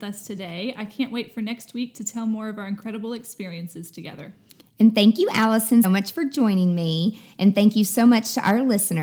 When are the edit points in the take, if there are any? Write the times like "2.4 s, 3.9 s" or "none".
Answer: 5.8 s